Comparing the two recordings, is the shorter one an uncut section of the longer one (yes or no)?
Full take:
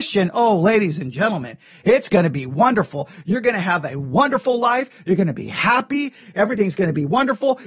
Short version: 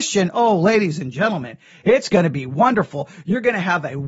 yes